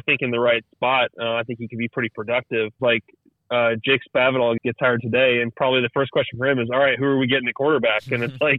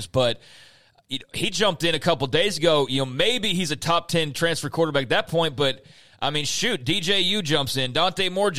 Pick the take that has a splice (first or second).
first